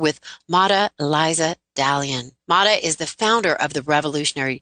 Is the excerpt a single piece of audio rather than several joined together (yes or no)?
no